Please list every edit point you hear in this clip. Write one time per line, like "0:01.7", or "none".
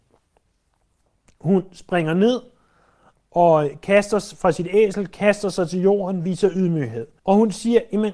0:07.2

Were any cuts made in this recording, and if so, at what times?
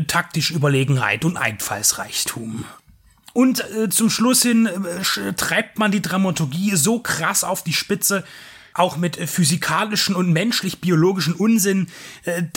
none

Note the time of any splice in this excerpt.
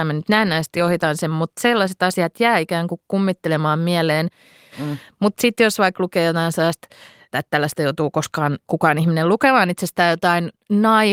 0:04.7
0:07.3
0:08.6

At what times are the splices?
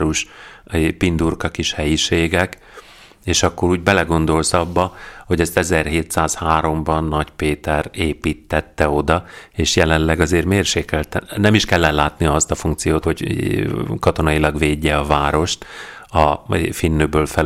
0:13.0

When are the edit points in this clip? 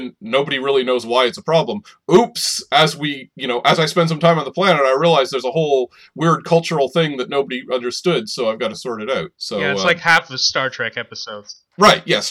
0:09.3

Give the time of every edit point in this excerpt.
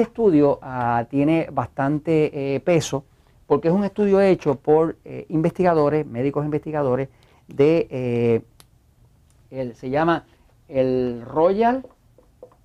none

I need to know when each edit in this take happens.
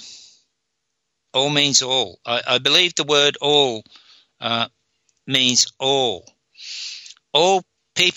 0:01.3

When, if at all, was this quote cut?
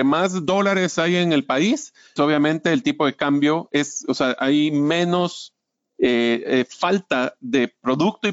0:02.2

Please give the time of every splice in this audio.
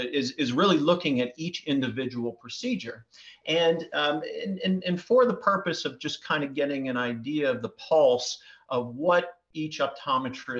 none

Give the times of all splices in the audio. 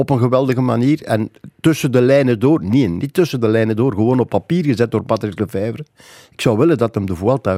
none

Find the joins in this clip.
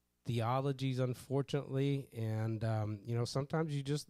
none

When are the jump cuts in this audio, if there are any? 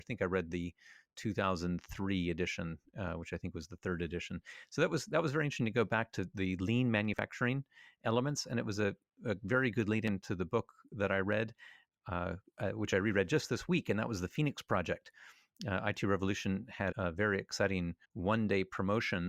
0:16.9
0:18.0

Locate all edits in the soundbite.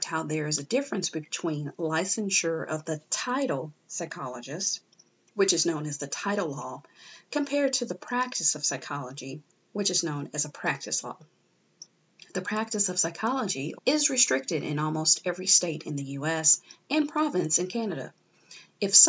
0:13.8

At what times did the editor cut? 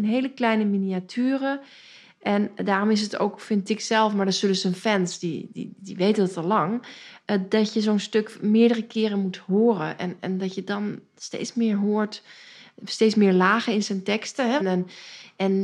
0:14.6

